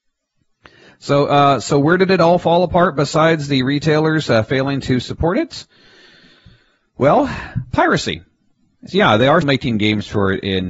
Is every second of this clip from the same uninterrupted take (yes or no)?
no